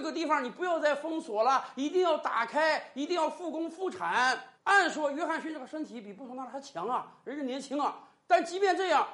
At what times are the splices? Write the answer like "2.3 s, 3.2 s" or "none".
4.6 s